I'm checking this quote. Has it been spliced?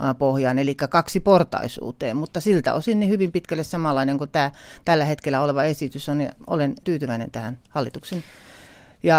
yes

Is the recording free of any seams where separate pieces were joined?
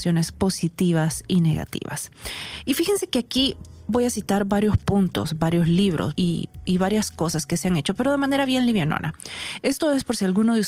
no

